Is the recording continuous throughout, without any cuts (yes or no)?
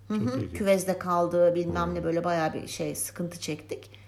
yes